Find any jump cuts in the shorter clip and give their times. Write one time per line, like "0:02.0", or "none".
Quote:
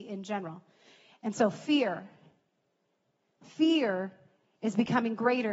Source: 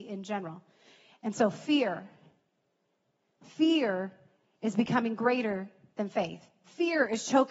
none